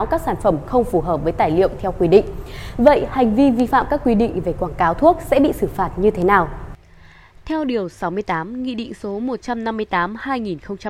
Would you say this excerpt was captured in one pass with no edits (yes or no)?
yes